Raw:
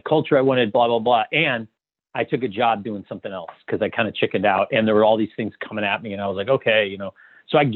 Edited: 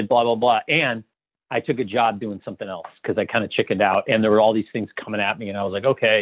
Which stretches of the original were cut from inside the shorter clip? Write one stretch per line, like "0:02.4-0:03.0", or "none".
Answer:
none